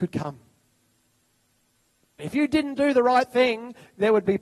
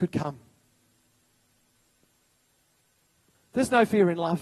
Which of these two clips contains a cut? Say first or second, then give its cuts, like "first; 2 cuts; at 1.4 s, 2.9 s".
first; 1 cut; at 2.2 s